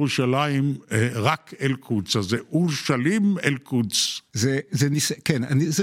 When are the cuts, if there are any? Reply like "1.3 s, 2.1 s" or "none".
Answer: 4.3 s

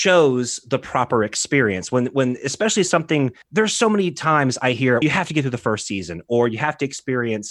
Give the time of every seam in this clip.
3.4 s, 5.0 s

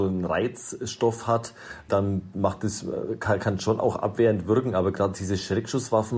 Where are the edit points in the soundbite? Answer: 1.9 s

